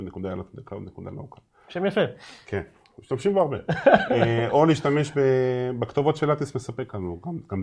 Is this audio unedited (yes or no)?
yes